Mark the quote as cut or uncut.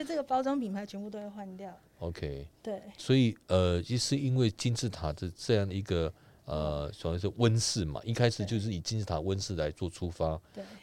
uncut